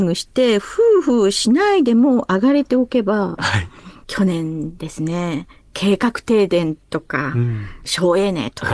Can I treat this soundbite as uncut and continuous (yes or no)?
no